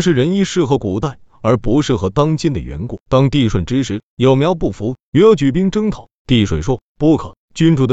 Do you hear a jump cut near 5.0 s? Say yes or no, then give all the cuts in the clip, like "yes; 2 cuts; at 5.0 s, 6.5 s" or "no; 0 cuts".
no; 1 cut; at 3.0 s